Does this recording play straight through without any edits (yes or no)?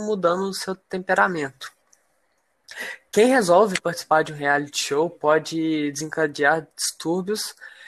yes